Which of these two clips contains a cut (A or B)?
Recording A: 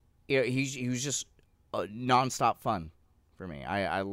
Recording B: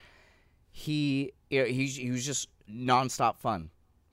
B